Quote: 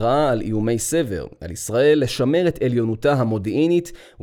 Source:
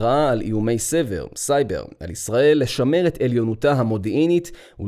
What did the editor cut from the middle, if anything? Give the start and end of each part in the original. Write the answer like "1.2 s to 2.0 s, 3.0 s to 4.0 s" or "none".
1.3 s to 1.9 s